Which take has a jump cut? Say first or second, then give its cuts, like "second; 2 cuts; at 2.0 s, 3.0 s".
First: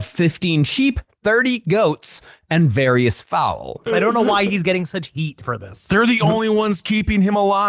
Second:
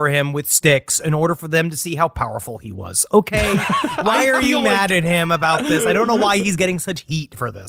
first; 1 cut; at 3.9 s